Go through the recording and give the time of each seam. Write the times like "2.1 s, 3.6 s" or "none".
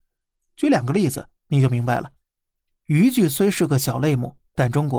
2.7 s